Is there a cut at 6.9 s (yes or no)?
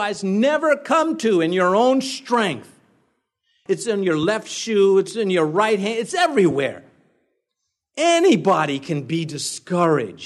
no